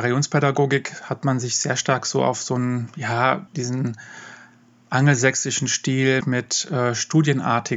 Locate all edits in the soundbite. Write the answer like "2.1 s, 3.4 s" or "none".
3.5 s, 6.2 s